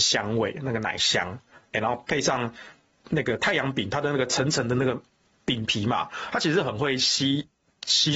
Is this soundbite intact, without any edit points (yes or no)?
yes